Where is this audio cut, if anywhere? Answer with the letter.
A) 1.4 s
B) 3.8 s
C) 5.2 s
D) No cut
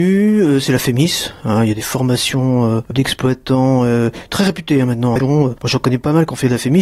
C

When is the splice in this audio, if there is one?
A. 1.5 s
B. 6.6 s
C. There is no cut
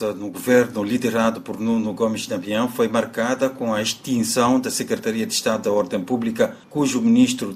C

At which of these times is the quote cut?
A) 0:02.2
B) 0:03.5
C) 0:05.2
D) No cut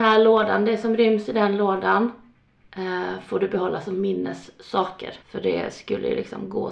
C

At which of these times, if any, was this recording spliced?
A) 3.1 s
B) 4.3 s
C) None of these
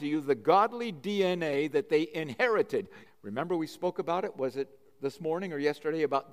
A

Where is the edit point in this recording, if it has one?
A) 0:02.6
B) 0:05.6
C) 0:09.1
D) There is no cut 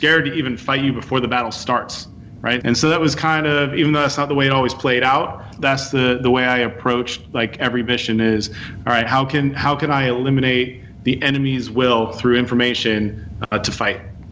A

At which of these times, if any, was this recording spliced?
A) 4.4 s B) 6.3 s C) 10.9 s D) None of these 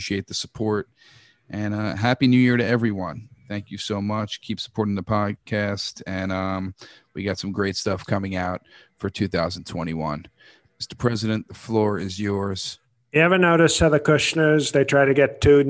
D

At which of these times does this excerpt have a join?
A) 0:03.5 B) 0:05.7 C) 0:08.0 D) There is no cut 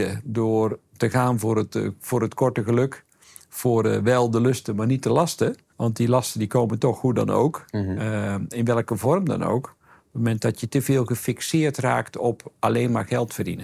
B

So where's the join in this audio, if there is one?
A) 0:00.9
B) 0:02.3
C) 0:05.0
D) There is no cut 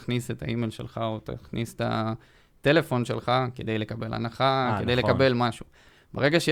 D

